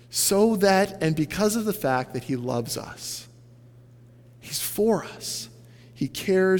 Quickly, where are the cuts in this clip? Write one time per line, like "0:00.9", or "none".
none